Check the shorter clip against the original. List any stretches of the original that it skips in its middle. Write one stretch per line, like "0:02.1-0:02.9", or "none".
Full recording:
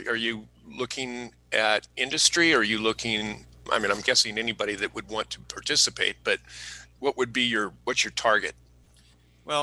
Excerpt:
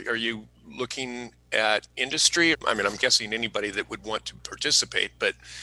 0:02.5-0:03.6